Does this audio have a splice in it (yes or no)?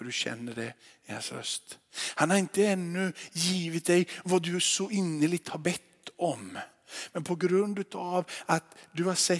no